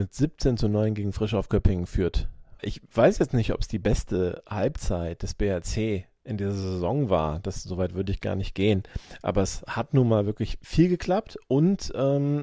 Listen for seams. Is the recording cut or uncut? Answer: uncut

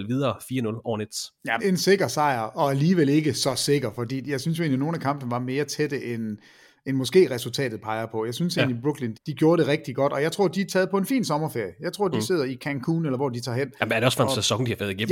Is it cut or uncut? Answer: cut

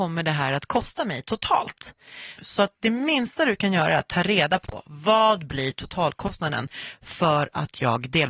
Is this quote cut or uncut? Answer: cut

